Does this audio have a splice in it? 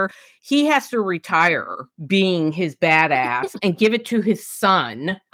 yes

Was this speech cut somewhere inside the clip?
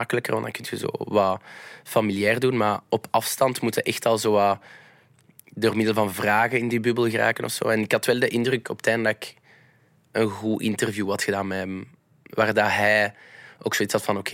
no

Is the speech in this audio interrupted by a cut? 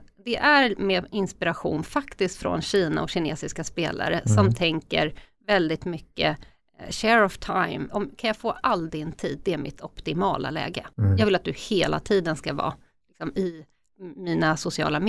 yes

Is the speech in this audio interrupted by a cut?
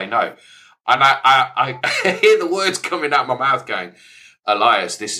no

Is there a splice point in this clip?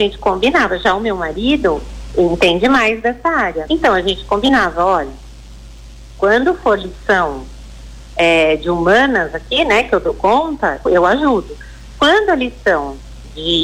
yes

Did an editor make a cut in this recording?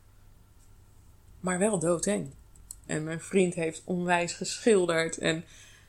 yes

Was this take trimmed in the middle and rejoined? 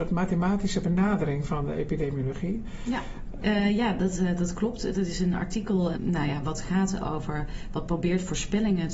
yes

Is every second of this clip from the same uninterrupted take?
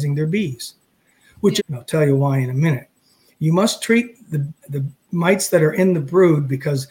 no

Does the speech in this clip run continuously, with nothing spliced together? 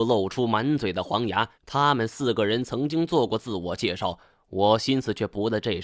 no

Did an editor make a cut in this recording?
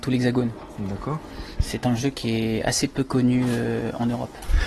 no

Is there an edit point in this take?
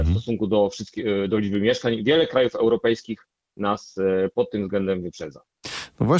no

